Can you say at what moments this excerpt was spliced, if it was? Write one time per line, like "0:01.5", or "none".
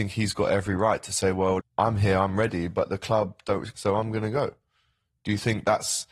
0:01.6
0:03.7